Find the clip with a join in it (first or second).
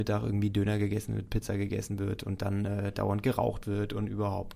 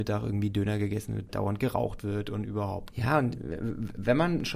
second